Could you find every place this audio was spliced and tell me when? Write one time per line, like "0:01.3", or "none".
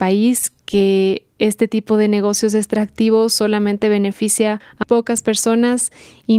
0:04.8